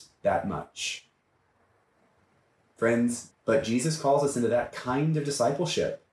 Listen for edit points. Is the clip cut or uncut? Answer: cut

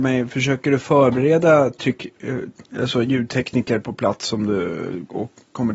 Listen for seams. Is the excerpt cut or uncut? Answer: uncut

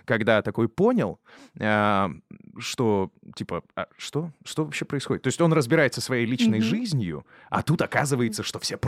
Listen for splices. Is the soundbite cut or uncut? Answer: uncut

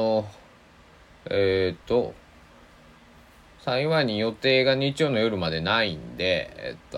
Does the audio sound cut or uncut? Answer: uncut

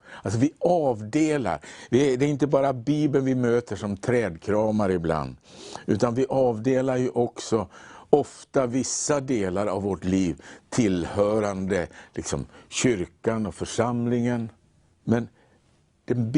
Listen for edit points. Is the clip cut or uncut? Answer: cut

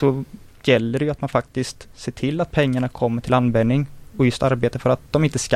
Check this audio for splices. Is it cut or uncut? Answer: uncut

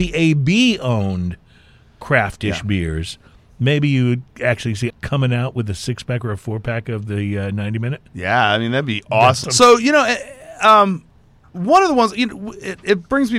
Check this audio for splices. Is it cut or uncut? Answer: cut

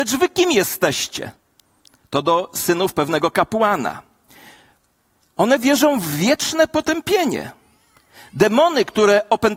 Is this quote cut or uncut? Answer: uncut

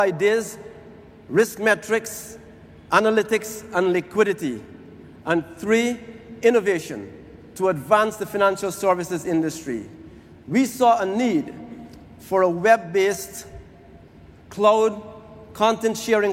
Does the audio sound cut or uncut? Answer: uncut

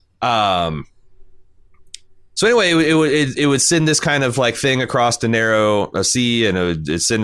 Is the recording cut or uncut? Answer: uncut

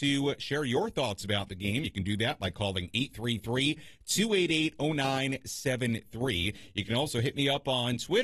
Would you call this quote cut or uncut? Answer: uncut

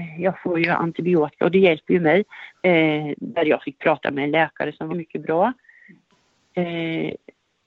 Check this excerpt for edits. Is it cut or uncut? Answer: cut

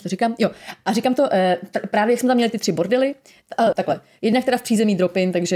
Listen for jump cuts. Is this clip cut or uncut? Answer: cut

